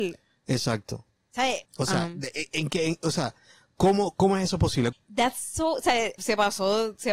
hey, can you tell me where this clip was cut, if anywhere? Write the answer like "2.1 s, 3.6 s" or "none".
1.6 s, 4.9 s, 6.2 s

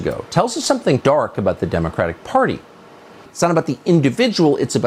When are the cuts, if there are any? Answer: 1.0 s, 3.3 s

